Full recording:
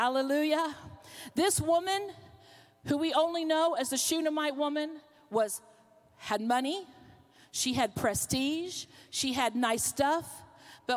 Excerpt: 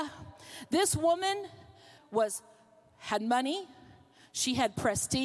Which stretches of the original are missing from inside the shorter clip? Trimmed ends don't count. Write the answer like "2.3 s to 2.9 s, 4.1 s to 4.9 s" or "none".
2.6 s to 5.2 s